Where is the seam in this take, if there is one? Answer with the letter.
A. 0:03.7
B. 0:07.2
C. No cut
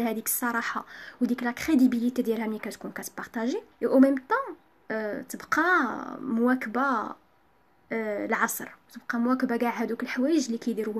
A